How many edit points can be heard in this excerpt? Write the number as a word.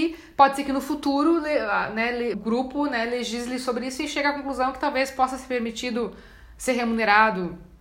one